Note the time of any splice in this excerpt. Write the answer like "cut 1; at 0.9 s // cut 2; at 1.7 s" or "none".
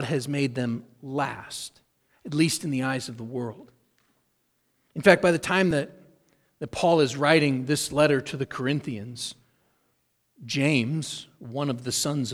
none